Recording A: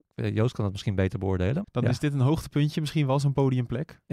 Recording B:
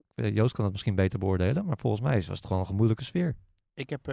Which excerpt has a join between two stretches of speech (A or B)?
A